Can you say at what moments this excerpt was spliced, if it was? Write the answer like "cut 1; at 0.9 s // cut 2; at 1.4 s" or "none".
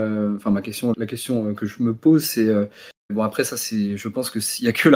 cut 1; at 0.9 s // cut 2; at 3.1 s